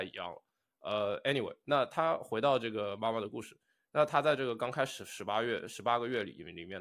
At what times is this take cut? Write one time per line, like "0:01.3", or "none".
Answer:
none